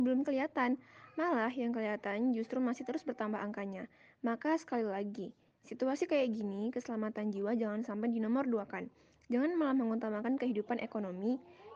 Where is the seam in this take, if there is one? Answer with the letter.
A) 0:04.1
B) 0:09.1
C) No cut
C